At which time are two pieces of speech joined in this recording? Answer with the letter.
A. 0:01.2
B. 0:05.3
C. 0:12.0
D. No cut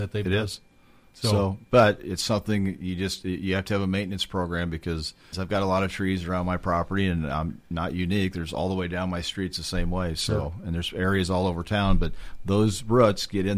B